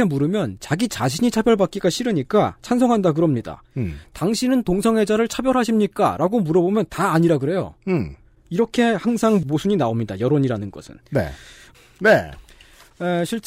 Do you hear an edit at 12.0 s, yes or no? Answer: yes